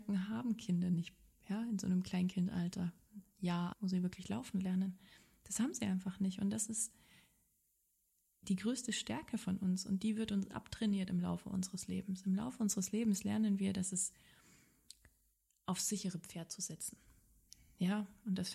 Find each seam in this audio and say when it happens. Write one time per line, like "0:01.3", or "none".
0:03.7